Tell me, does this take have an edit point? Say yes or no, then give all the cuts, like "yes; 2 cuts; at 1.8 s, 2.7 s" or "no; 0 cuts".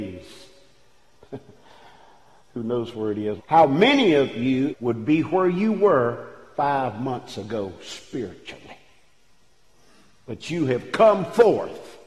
yes; 3 cuts; at 1.2 s, 3.4 s, 4.7 s